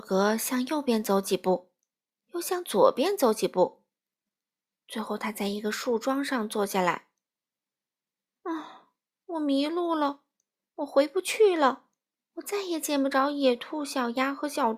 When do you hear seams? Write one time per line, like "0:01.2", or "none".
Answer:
none